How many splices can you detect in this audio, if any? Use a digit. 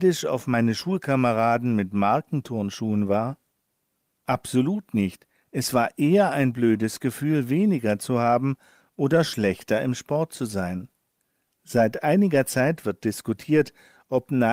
0